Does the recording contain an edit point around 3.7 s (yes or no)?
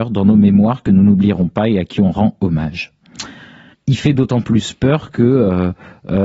yes